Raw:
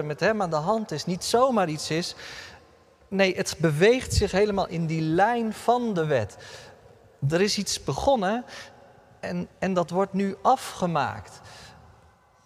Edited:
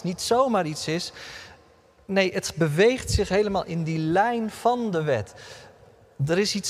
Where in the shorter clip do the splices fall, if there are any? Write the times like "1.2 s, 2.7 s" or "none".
none